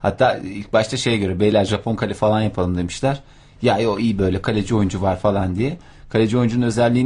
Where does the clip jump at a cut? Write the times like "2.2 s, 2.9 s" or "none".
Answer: none